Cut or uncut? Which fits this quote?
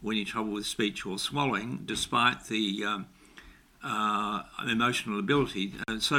uncut